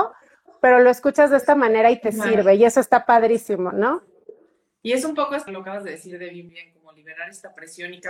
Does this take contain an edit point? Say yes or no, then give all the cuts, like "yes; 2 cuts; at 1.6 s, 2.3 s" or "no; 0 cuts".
yes; 2 cuts; at 5.5 s, 6.5 s